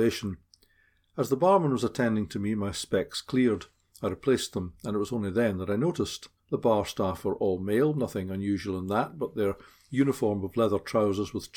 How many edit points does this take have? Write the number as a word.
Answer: one